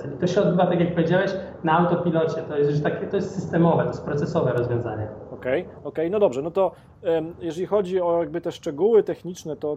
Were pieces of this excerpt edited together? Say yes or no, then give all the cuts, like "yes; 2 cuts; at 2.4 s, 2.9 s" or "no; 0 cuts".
no; 0 cuts